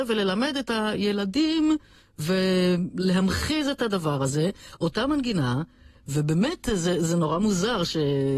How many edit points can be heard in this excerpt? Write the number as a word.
zero